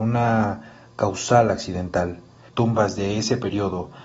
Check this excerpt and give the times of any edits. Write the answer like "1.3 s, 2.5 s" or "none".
2.5 s